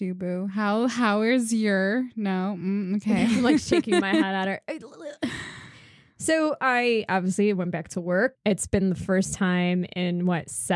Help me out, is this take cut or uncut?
uncut